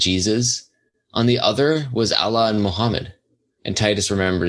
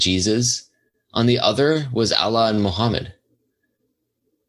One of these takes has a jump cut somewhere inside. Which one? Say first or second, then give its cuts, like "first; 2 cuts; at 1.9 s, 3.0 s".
first; 1 cut; at 3.6 s